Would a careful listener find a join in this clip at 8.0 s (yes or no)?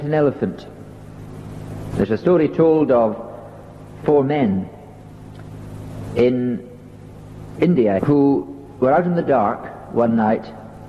yes